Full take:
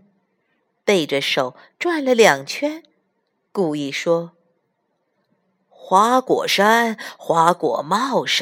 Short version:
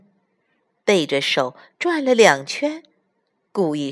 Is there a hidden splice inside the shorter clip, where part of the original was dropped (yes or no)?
no